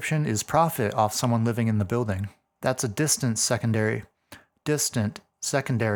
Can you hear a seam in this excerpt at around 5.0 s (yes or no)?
no